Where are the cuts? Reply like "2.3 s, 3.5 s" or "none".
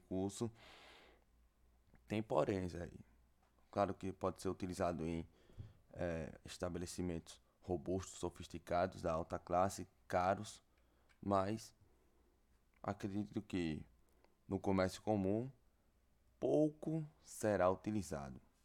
none